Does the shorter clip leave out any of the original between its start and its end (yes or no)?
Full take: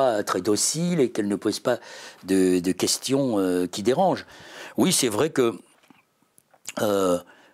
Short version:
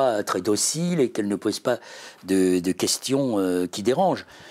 no